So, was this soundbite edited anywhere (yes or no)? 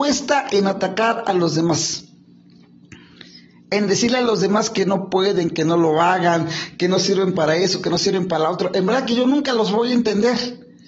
no